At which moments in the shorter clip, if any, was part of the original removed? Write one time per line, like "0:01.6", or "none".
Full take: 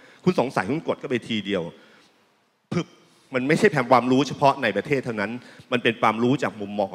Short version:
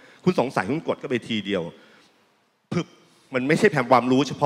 none